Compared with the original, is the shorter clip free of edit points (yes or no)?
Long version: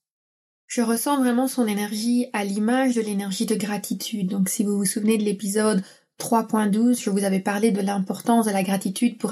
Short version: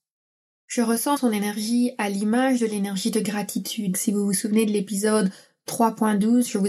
no